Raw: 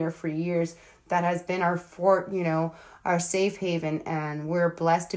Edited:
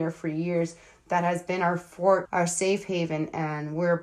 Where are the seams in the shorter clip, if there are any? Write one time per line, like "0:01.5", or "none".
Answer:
0:02.3